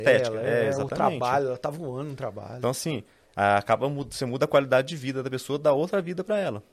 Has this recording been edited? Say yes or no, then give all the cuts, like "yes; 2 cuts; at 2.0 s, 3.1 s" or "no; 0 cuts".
no; 0 cuts